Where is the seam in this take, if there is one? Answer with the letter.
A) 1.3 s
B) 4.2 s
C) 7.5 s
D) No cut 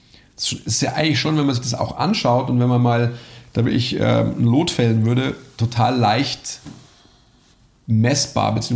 D